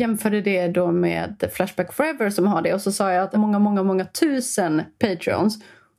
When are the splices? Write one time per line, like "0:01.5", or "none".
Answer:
0:03.3